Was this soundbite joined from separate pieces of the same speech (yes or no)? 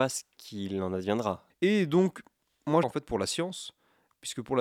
yes